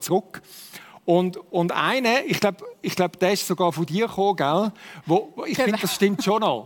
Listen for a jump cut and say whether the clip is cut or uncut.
uncut